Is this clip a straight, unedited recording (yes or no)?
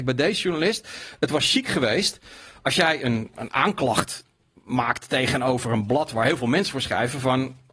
no